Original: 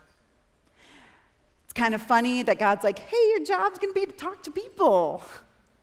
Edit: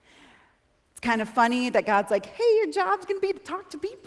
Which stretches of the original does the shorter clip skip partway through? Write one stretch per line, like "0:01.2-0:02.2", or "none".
none

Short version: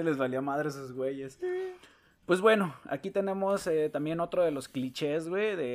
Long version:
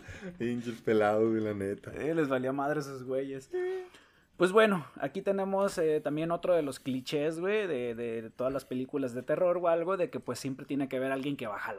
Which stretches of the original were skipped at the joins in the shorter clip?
none

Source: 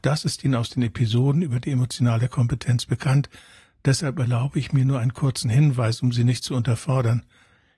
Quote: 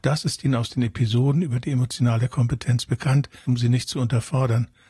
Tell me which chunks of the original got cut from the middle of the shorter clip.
0:03.5-0:06.0

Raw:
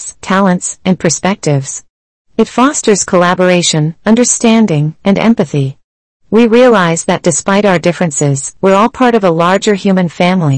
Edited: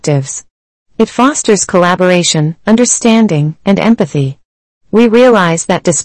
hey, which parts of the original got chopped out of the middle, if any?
none

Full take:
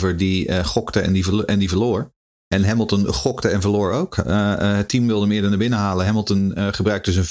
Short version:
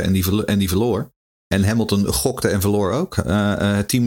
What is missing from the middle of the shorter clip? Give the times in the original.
none

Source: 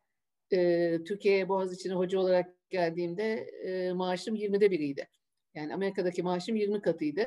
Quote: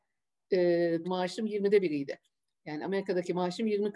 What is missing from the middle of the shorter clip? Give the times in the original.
0:01.0-0:03.9

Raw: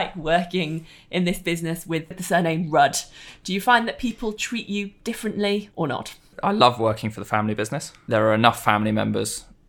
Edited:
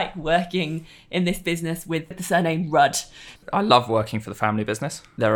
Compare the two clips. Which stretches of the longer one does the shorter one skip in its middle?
0:03.4-0:06.3

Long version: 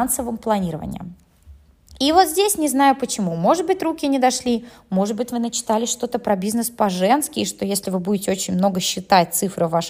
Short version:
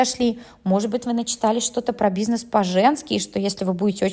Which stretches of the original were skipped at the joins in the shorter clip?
none

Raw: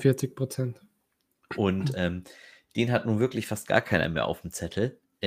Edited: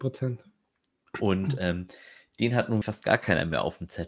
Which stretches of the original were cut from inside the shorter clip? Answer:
0:03.2-0:03.5

